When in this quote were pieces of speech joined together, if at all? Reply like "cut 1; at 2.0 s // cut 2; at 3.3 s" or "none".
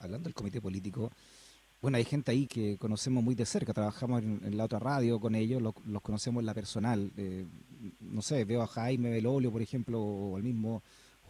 cut 1; at 2.5 s